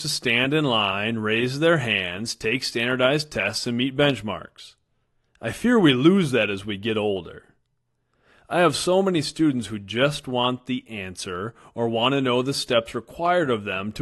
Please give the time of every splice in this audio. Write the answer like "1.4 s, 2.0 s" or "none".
5.3 s